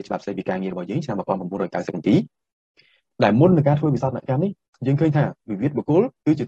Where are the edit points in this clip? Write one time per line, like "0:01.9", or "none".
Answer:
none